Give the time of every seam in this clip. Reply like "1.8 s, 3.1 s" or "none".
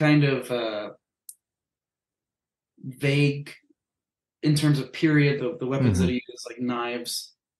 5.4 s

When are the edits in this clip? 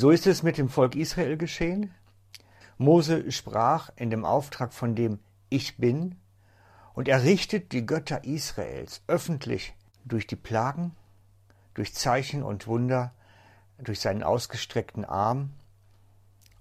2.6 s

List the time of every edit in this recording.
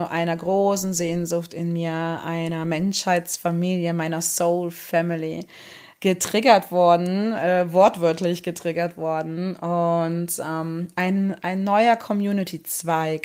none

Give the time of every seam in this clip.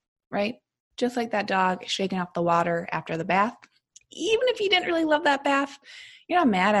none

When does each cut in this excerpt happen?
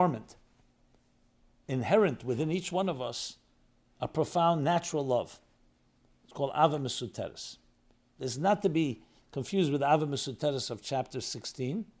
none

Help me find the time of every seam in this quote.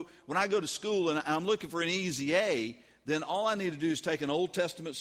none

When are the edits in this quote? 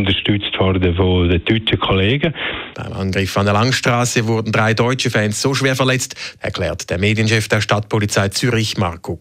2.7 s, 6.4 s

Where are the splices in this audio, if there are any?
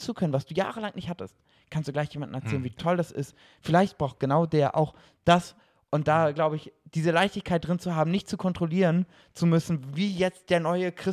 none

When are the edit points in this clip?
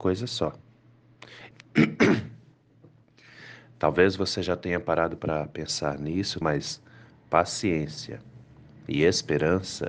1.5 s, 6.4 s

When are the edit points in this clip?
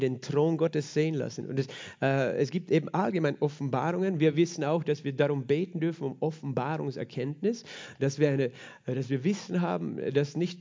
1.4 s

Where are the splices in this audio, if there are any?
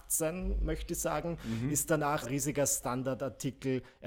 2.2 s

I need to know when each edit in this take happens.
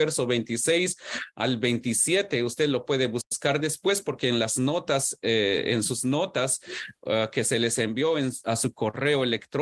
none

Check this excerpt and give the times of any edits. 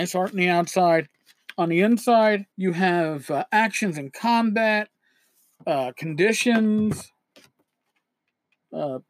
2.5 s

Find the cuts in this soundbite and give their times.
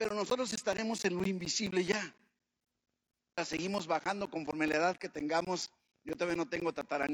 3.4 s

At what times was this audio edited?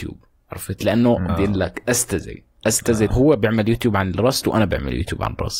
1.3 s, 3.1 s

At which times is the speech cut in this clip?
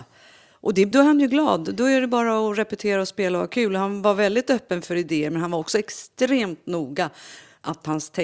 0.9 s

